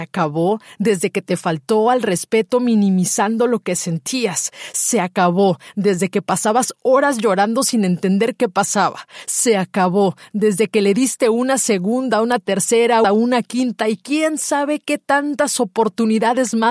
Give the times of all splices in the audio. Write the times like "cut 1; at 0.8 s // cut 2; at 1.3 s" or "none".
cut 1; at 13.0 s